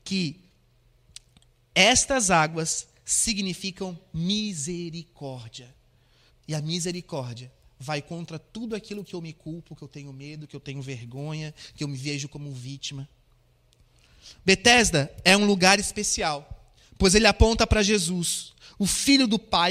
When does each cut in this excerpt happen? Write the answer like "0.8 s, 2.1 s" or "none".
6.3 s